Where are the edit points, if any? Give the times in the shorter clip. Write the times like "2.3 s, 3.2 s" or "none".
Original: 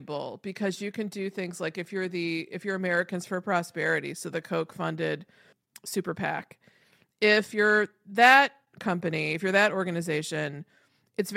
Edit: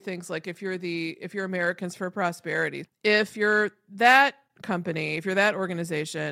2.8 s